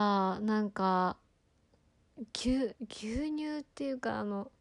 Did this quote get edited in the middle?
no; 0 cuts

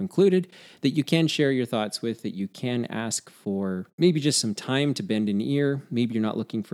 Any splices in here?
yes; 1 cut; at 3.9 s

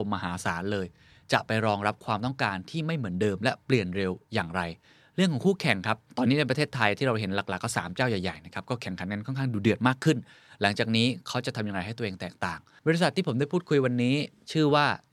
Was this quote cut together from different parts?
no; 0 cuts

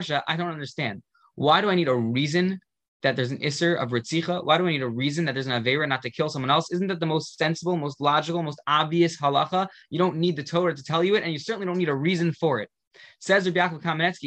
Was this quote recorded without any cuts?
yes; 0 cuts

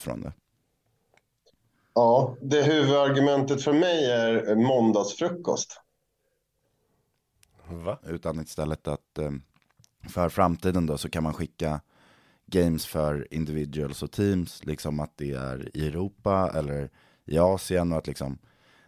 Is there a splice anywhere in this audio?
yes; 2 cuts; at 2.4 s, 8.0 s

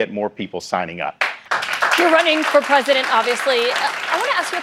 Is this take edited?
no; 0 cuts

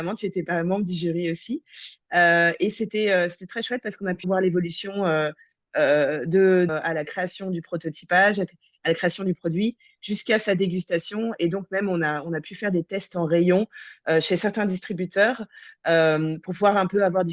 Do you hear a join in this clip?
yes; 2 cuts; at 4.2 s, 6.7 s

